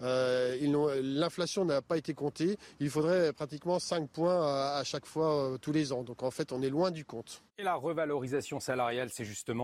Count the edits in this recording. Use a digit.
1